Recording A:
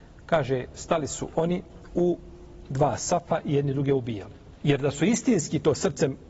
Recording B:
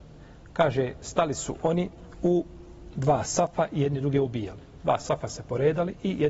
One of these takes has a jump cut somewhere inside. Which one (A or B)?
A